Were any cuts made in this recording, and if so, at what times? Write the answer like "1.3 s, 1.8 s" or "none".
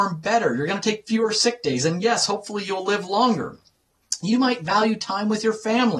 none